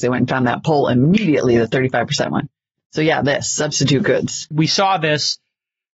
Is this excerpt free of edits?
no; 1 cut; at 4.5 s

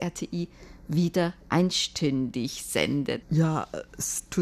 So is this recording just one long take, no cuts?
no; 1 cut; at 3.2 s

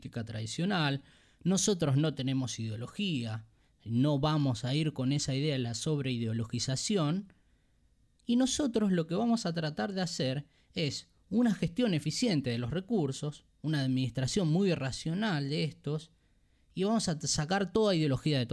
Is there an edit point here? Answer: no; 0 cuts

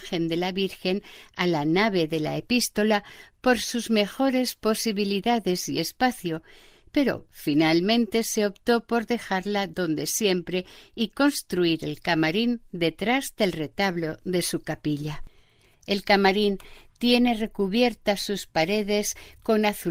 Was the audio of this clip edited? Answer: yes; 1 cut; at 15.7 s

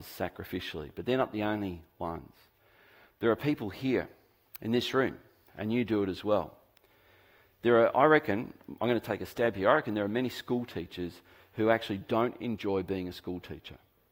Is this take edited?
no; 0 cuts

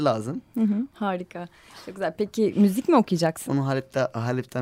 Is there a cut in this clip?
yes; 2 cuts; at 0.9 s, 3.5 s

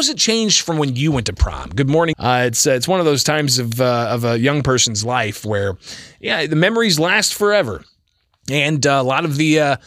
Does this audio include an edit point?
yes; 1 cut; at 2.1 s

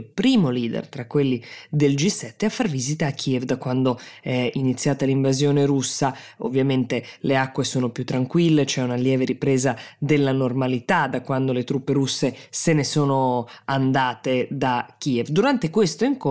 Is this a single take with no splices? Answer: yes; 0 cuts

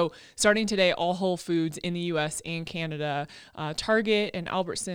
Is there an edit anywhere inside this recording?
no; 0 cuts

